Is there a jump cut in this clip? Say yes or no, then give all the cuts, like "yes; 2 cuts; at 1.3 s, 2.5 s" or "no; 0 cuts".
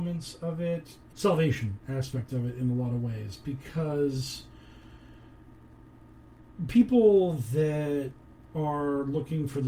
yes; 1 cut; at 1.1 s